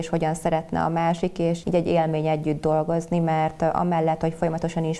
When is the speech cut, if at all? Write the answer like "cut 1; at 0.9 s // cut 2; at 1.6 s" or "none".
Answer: cut 1; at 1.6 s